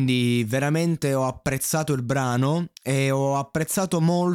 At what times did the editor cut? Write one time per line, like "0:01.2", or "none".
0:02.8